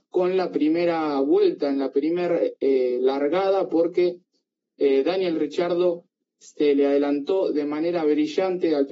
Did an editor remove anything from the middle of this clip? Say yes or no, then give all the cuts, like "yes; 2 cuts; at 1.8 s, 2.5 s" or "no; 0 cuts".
no; 0 cuts